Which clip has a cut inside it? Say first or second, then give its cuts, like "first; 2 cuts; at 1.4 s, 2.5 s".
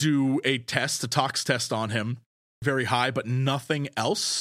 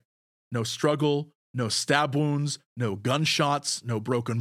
first; 1 cut; at 2.6 s